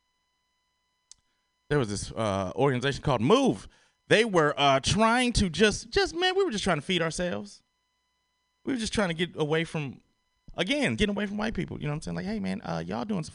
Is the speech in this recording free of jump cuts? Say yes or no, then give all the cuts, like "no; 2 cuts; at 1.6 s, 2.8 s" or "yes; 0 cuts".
no; 1 cut; at 11.0 s